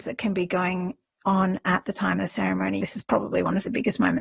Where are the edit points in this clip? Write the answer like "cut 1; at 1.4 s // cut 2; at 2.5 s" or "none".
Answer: cut 1; at 2.8 s